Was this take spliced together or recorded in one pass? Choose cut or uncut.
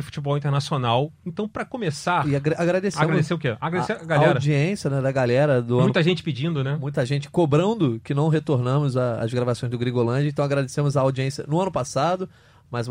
uncut